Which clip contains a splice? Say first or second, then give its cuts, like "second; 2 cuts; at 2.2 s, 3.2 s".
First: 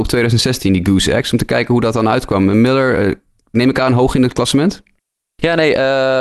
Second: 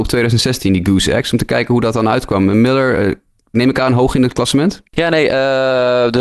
second; 1 cut; at 4.9 s